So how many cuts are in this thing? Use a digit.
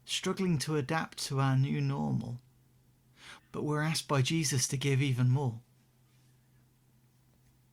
1